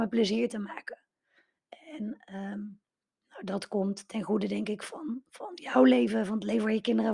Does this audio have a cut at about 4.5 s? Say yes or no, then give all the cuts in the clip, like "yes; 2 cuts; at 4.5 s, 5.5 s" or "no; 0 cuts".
no; 0 cuts